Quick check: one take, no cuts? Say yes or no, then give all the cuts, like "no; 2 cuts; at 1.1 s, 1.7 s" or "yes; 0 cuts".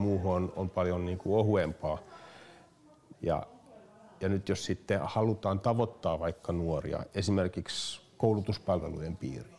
no; 1 cut; at 3.1 s